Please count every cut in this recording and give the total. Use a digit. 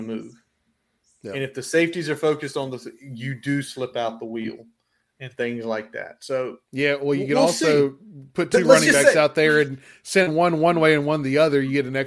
0